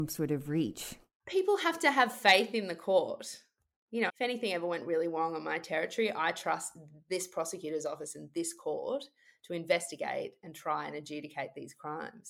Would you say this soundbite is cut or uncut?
cut